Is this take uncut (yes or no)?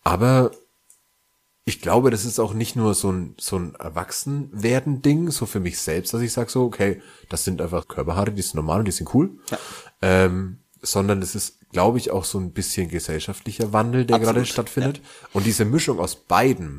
no